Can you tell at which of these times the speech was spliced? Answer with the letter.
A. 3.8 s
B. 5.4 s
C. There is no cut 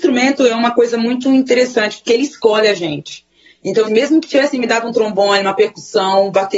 A